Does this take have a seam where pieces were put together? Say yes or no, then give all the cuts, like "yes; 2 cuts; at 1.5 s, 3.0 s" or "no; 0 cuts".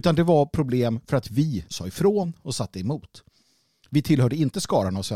yes; 1 cut; at 1.7 s